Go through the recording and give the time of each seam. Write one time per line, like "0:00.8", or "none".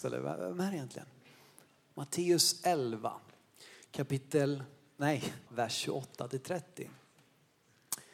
0:05.5